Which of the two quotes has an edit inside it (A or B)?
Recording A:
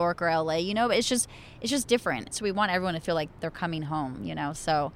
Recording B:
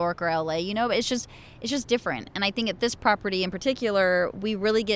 A